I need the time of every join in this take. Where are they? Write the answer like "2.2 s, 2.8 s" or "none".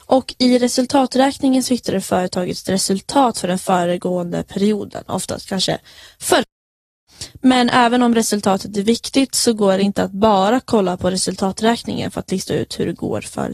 none